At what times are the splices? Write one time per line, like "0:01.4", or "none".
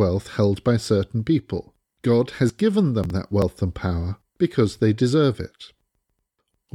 none